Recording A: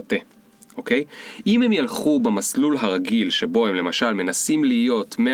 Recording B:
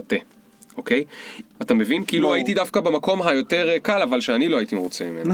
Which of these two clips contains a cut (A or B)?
B